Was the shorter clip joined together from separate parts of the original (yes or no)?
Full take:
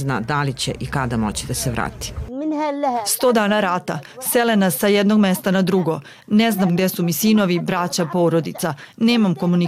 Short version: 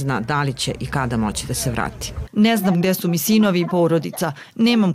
yes